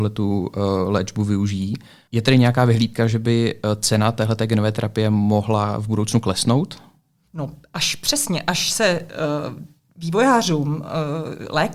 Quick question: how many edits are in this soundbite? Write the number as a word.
zero